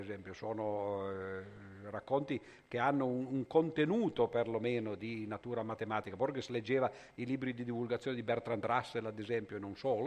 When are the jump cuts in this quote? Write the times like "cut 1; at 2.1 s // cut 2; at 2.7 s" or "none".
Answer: none